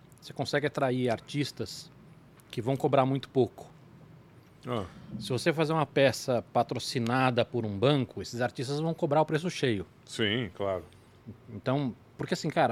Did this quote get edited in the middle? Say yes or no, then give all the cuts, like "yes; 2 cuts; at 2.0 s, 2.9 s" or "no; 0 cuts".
no; 0 cuts